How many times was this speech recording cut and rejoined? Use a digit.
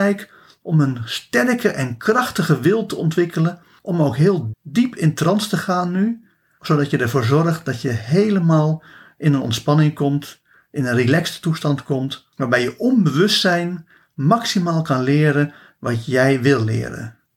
2